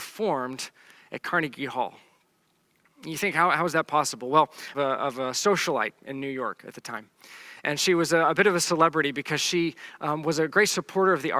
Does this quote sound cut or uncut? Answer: cut